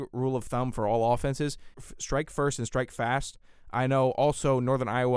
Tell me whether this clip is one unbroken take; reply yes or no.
no